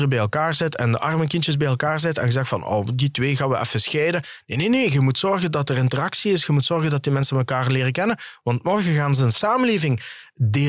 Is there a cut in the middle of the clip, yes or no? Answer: no